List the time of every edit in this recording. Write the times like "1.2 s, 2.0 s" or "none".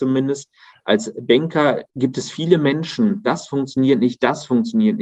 1.9 s, 3.2 s